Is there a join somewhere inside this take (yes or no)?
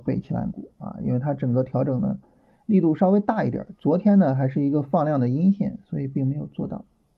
no